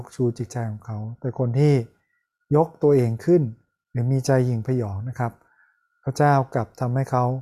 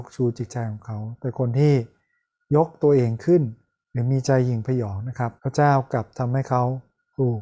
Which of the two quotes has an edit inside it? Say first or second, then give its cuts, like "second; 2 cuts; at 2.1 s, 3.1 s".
second; 1 cut; at 5.4 s